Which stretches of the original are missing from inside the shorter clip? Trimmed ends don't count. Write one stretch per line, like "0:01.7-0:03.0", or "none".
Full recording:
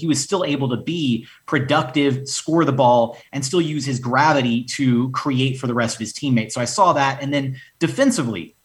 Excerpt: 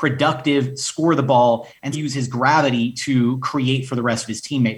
0:03.4-0:03.6